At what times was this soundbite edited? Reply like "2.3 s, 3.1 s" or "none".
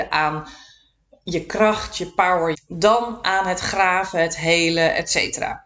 2.5 s